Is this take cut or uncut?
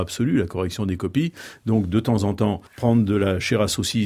cut